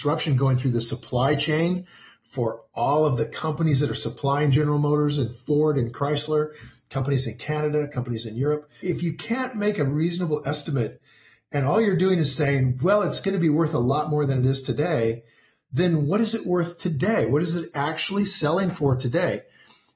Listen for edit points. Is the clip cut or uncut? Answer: cut